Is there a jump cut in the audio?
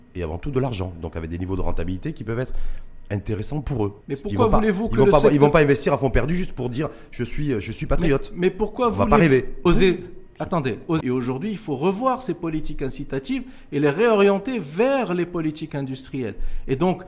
yes; 3 cuts; at 4.0 s, 9.7 s, 11.0 s

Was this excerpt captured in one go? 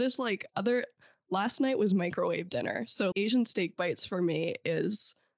no; 1 cut; at 3.1 s

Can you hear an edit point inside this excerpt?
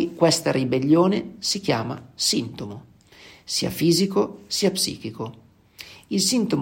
no; 0 cuts

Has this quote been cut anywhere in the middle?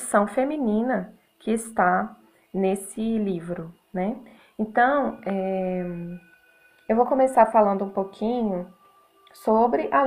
no; 0 cuts

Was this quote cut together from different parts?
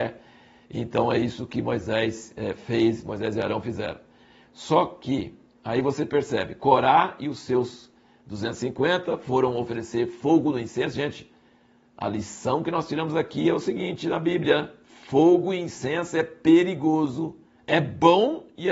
no; 0 cuts

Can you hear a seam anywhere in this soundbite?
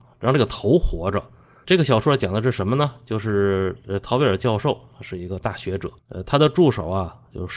yes; 2 cuts; at 1.6 s, 6.0 s

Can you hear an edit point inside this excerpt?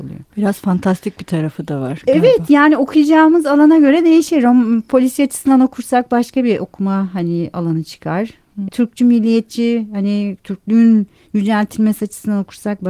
yes; 1 cut; at 8.7 s

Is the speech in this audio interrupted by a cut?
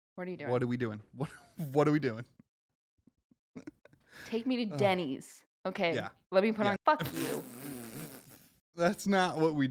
yes; 2 cuts; at 6.8 s, 8.6 s

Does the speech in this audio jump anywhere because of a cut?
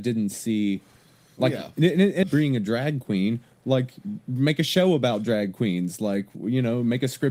yes; 1 cut; at 2.2 s

